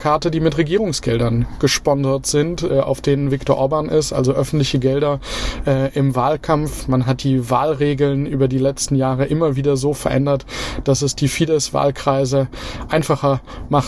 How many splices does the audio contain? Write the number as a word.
zero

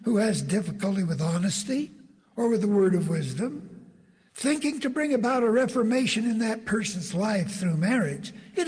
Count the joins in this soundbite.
one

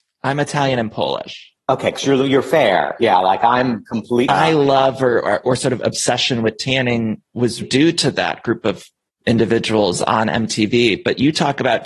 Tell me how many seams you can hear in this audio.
two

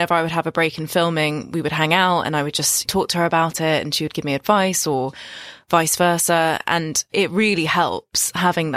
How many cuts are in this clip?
one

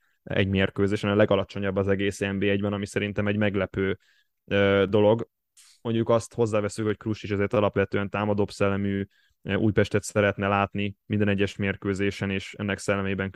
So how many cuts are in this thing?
zero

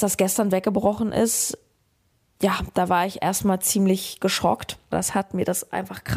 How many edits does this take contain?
one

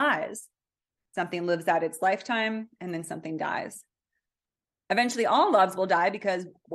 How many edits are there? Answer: one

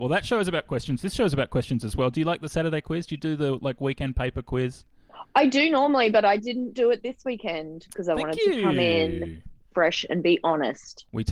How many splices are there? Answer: zero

